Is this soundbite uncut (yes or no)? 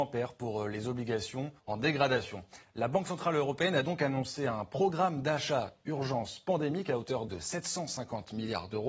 no